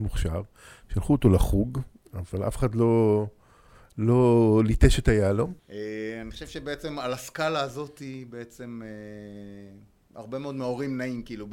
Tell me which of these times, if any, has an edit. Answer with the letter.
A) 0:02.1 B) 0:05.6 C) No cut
B